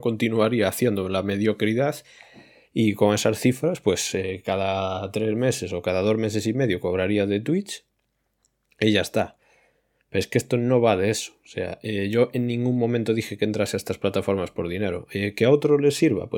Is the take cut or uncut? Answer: uncut